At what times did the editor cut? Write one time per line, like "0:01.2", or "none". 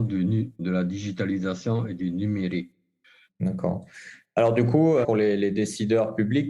0:03.3
0:05.0